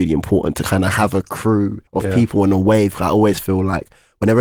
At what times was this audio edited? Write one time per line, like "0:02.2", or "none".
0:01.9